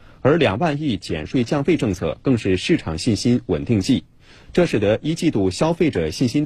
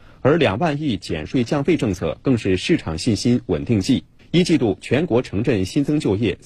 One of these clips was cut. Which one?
second; 1 cut; at 4.2 s

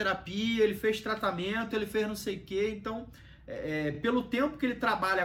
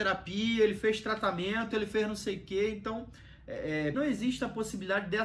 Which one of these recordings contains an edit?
second; 1 cut; at 3.9 s

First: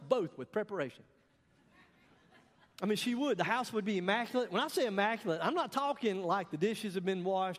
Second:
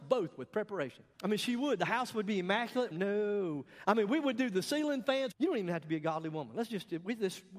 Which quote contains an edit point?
second; 3 cuts; at 1.1 s, 2.9 s, 5.3 s

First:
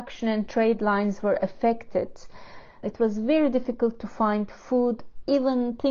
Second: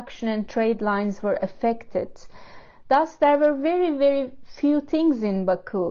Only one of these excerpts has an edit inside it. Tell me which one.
first; 1 cut; at 2.8 s

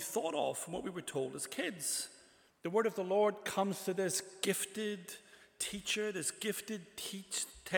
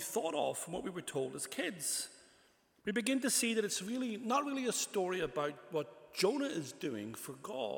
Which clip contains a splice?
first; 1 cut; at 2.5 s

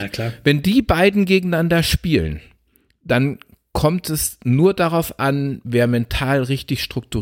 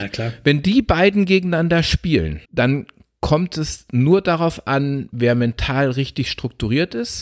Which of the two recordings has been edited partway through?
second; 1 cut; at 2.4 s

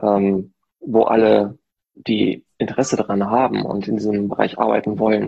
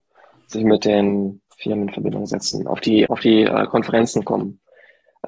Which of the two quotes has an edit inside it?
second; 2 cuts; at 1.5 s, 3.1 s

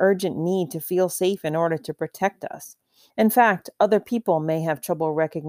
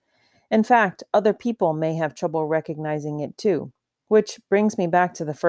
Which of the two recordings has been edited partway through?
first; 1 cut; at 3.1 s

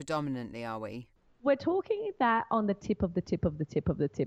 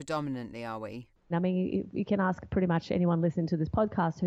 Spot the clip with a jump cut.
second; 1 cut; at 1.3 s

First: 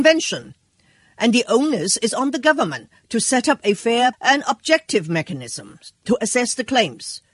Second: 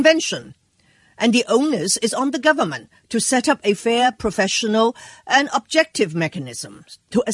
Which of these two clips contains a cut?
first; 1 cut; at 4.1 s

